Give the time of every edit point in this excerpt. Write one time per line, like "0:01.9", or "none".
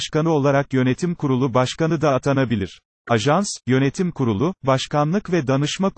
0:03.0